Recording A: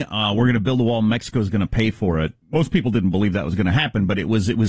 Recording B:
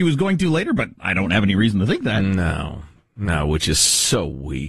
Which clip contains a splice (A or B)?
A